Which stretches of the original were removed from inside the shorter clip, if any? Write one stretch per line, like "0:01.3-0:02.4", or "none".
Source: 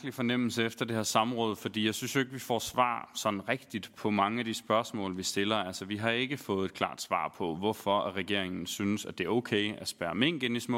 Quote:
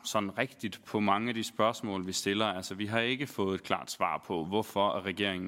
none